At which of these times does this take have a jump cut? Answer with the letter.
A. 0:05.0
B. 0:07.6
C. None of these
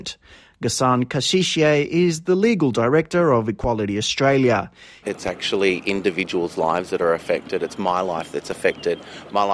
A